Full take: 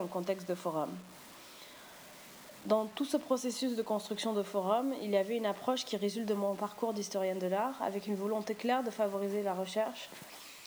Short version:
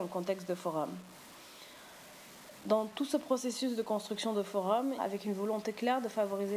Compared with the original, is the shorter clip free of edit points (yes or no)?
no